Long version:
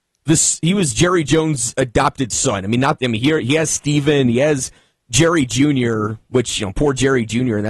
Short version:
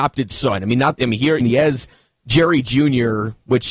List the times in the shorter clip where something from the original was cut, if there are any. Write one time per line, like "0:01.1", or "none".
0:01.4